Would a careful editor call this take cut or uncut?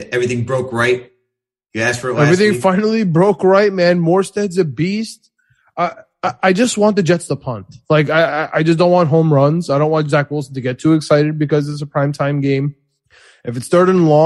uncut